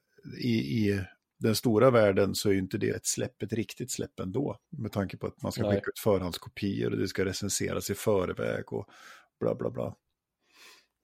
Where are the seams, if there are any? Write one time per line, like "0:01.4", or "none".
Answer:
0:02.9
0:04.6